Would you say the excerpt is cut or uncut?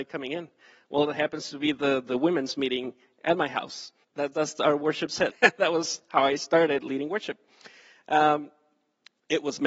cut